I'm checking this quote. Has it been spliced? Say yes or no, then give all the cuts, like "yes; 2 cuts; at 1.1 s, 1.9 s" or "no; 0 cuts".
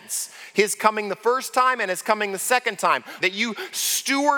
yes; 1 cut; at 3.2 s